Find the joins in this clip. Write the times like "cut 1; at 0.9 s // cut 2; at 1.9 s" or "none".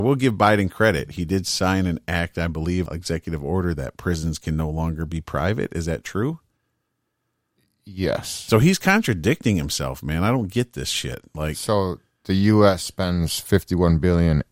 cut 1; at 2.9 s